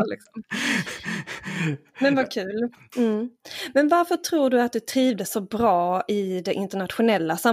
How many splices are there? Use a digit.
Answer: 1